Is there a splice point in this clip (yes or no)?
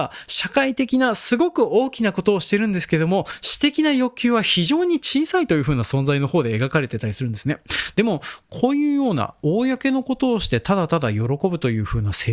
yes